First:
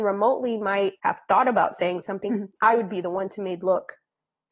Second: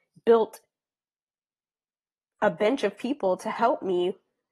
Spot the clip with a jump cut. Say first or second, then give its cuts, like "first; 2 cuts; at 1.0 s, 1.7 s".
first; 2 cuts; at 1.0 s, 2.3 s